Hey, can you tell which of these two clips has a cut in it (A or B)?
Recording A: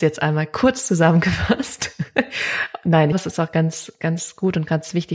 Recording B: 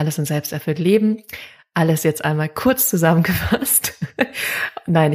A